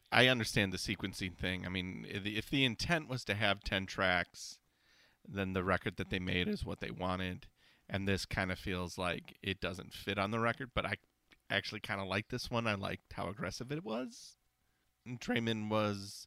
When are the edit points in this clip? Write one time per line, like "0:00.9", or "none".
none

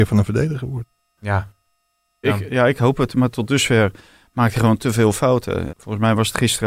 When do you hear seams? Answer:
0:02.2
0:05.7

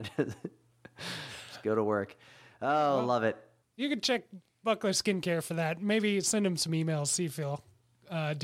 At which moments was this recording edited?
none

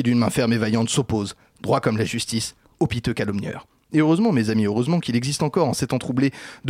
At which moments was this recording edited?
none

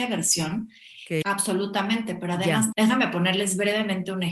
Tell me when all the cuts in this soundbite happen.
0:01.2
0:02.7

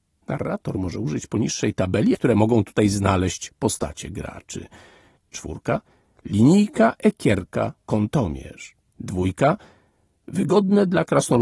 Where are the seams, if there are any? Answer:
0:02.1
0:05.2
0:08.9

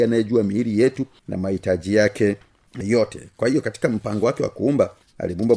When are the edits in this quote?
0:02.8

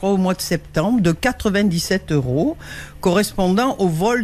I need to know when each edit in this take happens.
none

